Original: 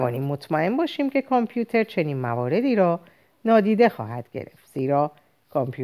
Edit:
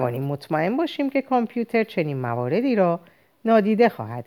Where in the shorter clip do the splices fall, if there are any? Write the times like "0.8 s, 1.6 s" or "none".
none